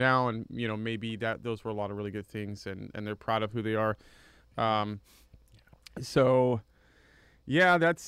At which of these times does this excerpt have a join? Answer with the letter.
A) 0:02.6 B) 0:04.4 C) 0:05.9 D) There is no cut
B